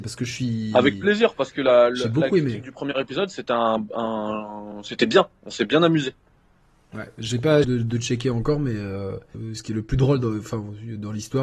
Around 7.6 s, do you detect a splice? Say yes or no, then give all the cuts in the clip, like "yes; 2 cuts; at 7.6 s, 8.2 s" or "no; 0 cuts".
yes; 2 cuts; at 7.6 s, 9.3 s